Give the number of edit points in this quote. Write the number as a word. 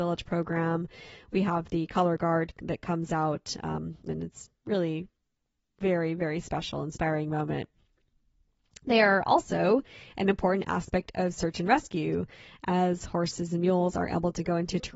one